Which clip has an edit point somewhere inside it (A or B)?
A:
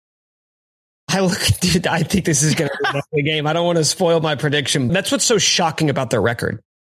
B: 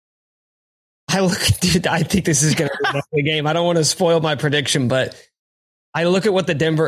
A